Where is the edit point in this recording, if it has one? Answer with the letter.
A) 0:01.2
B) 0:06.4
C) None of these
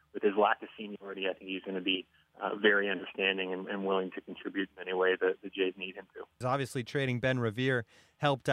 B